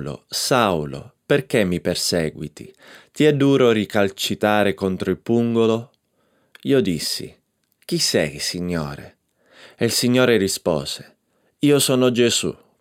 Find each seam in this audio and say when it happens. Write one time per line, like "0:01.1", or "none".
none

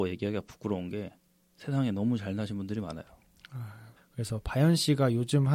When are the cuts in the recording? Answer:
0:04.0

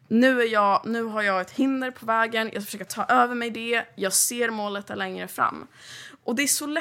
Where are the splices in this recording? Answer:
0:02.9

